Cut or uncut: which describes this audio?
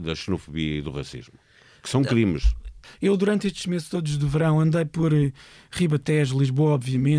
cut